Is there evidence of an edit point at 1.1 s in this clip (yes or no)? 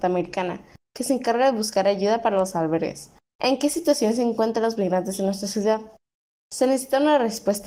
no